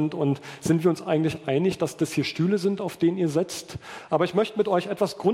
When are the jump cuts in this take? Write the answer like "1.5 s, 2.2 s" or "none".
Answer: 4.1 s

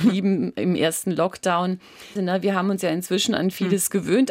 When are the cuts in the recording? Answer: 2.2 s

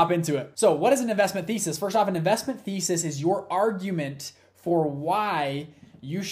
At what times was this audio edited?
none

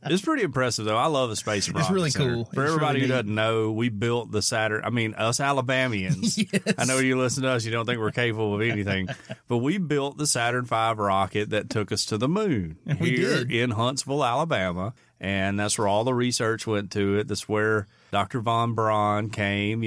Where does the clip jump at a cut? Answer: none

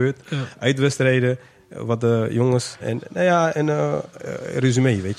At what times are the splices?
2.8 s

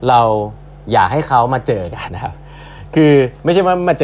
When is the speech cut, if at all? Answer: 2.1 s

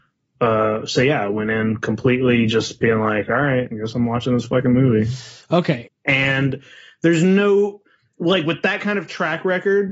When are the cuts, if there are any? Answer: 5.9 s

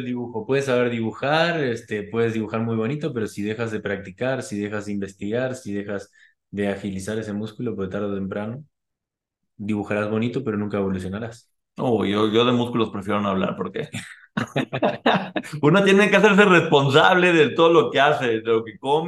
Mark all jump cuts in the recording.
none

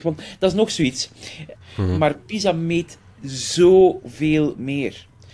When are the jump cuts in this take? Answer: 1.6 s

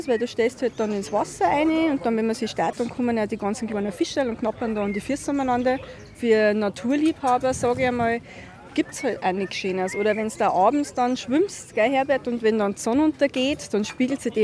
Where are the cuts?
2.7 s

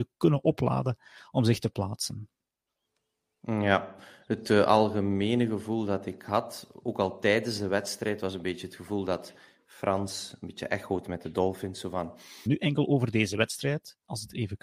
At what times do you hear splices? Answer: 12.5 s

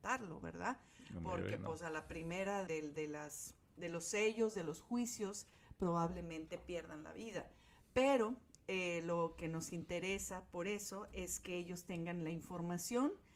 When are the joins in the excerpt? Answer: 2.7 s

